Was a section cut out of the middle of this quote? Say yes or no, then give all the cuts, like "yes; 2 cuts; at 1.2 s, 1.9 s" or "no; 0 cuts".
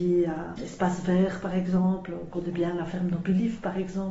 no; 0 cuts